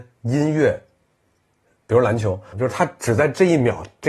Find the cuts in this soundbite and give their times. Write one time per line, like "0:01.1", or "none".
0:02.5